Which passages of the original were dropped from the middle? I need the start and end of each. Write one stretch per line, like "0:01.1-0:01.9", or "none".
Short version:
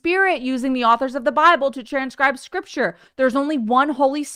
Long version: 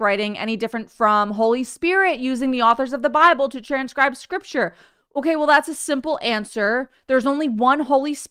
0:04.8-0:07.0